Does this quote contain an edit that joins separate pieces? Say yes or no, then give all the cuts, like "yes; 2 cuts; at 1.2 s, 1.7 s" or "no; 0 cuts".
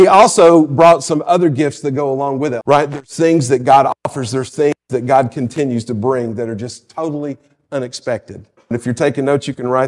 yes; 2 cuts; at 2.6 s, 8.7 s